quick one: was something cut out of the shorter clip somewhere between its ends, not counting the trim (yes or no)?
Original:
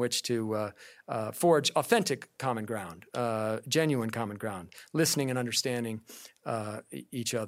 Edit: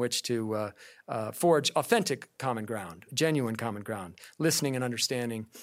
yes